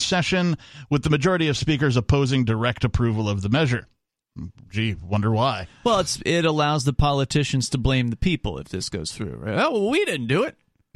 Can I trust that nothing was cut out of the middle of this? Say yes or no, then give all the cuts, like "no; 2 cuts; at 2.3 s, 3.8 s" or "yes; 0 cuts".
yes; 0 cuts